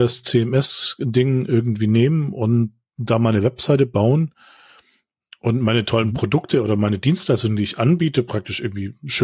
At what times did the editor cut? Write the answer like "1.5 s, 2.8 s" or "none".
none